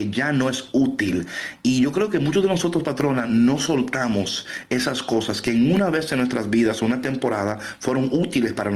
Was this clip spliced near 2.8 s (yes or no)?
no